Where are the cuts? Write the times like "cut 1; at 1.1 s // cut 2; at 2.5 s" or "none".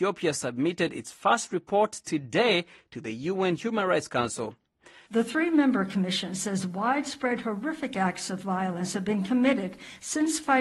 cut 1; at 5.0 s